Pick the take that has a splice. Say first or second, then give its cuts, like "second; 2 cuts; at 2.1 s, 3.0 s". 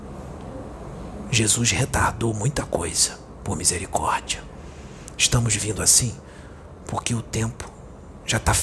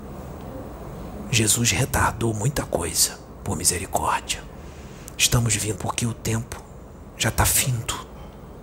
second; 1 cut; at 5.8 s